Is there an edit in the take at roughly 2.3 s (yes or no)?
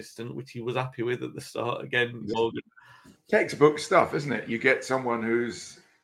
yes